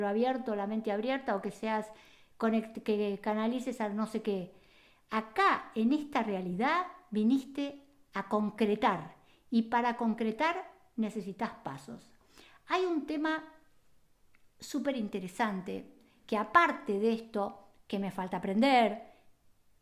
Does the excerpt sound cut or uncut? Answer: uncut